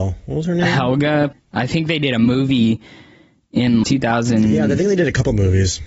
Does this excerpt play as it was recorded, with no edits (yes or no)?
no